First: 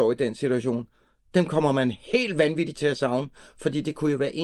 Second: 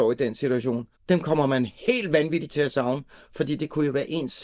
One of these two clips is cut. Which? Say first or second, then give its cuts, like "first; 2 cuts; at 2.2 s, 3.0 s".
second; 1 cut; at 1.0 s